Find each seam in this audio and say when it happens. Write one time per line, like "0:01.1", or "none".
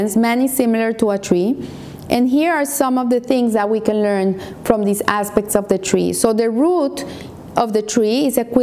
none